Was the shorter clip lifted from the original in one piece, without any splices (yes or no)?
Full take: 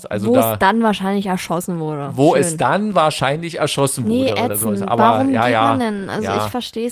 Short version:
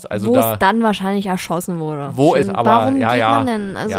no